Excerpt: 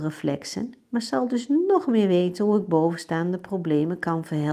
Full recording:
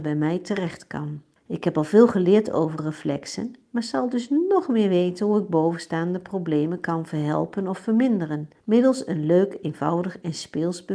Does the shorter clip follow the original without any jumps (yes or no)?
yes